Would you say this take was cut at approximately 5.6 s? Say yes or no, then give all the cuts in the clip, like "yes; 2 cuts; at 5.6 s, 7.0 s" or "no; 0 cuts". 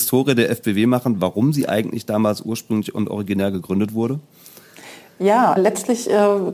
yes; 1 cut; at 5.6 s